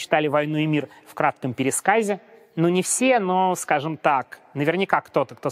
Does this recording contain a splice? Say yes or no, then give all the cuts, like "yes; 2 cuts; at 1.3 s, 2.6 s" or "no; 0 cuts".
no; 0 cuts